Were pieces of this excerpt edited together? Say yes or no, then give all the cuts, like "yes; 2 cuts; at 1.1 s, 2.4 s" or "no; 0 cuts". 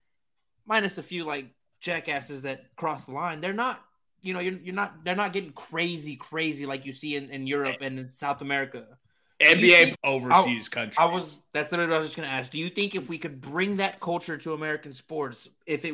yes; 1 cut; at 9.9 s